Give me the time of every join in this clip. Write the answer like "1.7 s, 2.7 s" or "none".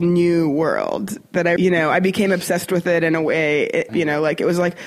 1.6 s, 3.9 s